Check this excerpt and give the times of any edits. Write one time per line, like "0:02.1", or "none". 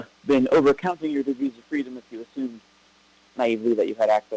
none

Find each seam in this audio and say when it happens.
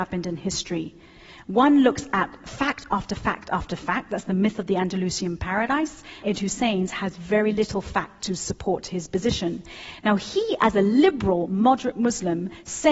0:06.2

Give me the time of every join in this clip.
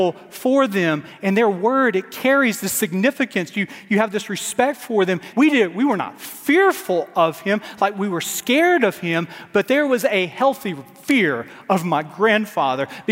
0:05.3

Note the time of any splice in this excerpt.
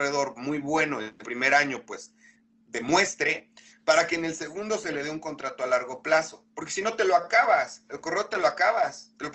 none

